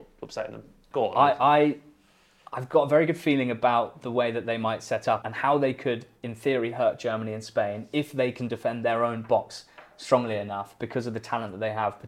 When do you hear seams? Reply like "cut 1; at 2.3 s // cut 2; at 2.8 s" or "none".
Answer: cut 1; at 0.9 s // cut 2; at 5.2 s